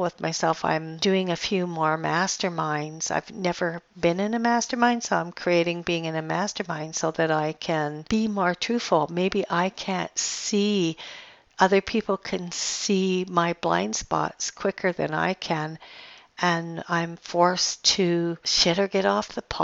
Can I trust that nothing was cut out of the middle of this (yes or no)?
yes